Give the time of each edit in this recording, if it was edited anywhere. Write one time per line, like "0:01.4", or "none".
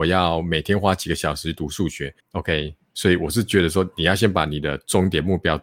0:02.2